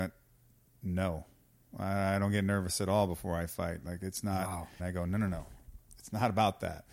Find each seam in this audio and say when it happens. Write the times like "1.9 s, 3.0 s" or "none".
4.8 s